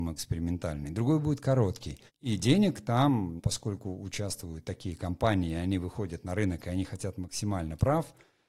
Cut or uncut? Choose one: cut